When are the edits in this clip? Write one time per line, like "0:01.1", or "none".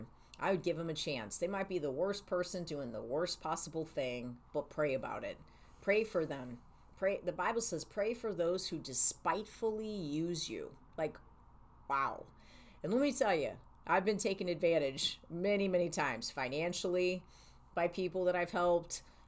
0:10.9

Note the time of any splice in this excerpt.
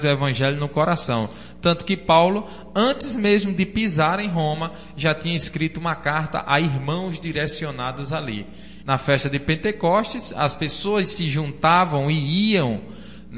0:08.8

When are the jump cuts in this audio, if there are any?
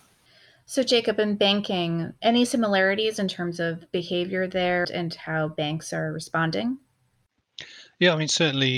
0:02.2
0:04.8

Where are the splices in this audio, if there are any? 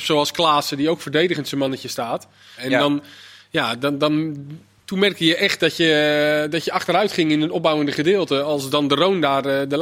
0:02.6

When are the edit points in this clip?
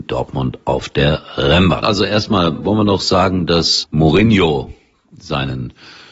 0:01.8
0:03.8

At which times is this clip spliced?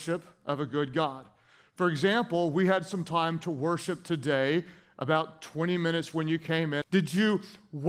0:06.8

